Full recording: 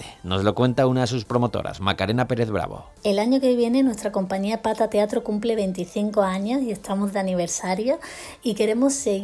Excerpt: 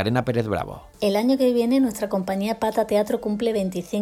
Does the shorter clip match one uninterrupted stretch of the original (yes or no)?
yes